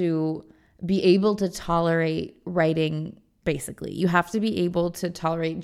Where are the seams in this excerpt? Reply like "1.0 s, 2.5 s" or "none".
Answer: 3.4 s